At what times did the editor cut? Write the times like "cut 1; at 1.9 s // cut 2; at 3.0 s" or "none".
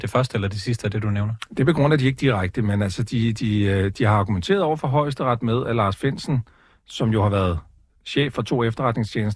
none

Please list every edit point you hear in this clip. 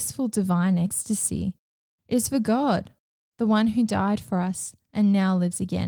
cut 1; at 3.3 s

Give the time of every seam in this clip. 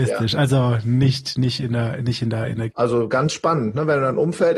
cut 1; at 2.7 s

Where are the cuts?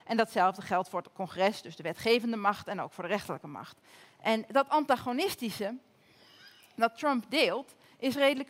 cut 1; at 4.0 s

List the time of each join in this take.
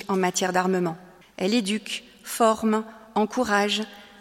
cut 1; at 1.2 s

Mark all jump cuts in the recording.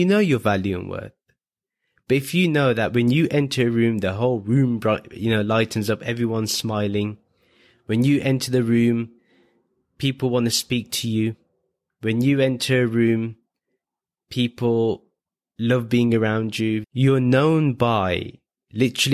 cut 1; at 16.8 s

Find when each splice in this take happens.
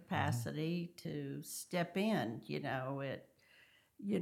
none

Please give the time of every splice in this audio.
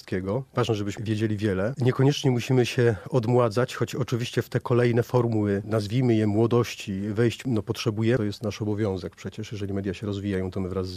none

